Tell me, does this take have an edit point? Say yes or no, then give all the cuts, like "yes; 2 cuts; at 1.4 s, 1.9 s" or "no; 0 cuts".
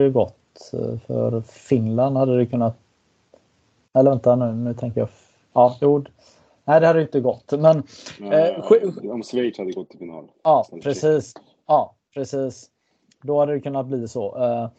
yes; 1 cut; at 9.0 s